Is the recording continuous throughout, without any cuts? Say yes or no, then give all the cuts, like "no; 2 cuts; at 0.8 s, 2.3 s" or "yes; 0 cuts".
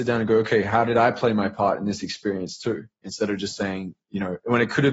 yes; 0 cuts